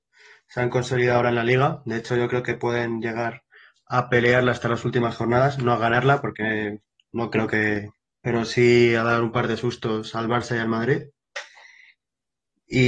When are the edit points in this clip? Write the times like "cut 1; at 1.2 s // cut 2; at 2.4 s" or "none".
cut 1; at 8.2 s